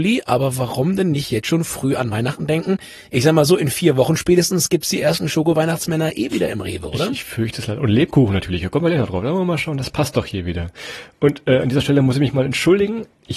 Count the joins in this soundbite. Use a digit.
0